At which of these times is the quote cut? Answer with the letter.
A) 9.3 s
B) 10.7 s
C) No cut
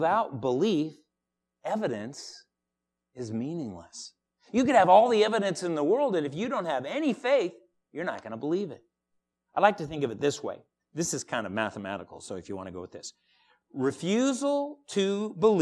C